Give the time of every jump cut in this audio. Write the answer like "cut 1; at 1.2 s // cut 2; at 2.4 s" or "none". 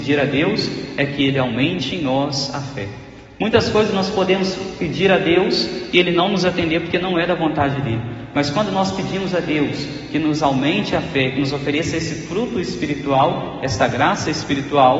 none